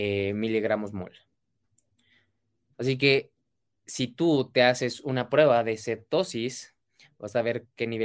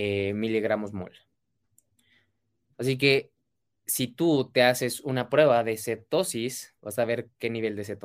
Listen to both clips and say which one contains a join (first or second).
second